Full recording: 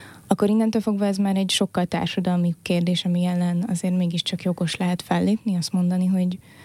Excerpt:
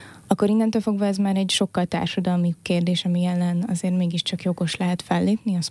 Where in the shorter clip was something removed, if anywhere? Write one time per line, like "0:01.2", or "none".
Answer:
none